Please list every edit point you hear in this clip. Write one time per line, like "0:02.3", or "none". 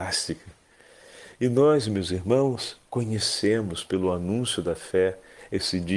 none